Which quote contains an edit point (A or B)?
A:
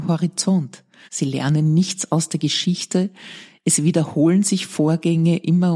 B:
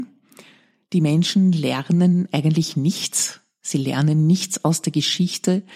A